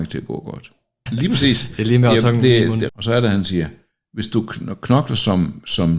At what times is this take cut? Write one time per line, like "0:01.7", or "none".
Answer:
0:01.1
0:02.9

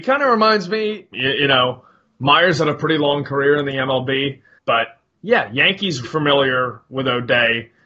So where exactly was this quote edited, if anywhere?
0:01.1
0:04.6
0:06.0

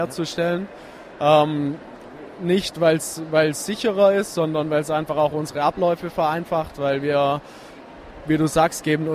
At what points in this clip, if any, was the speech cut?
none

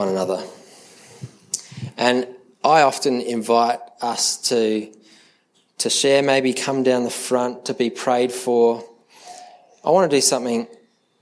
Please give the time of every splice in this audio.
none

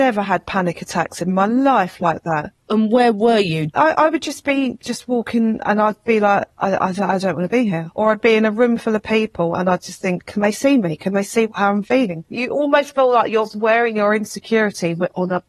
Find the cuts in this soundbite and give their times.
none

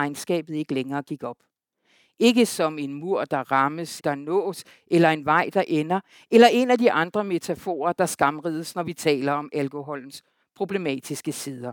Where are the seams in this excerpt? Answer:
0:04.0

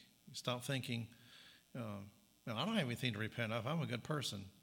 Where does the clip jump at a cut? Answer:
none

